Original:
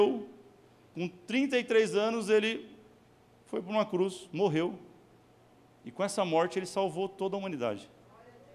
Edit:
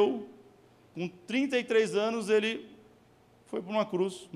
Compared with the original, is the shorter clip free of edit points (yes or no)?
yes